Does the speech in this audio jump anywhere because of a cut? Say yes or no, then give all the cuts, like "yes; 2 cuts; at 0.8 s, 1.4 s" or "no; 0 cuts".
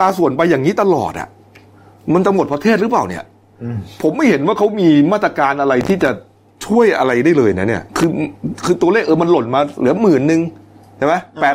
yes; 1 cut; at 7.9 s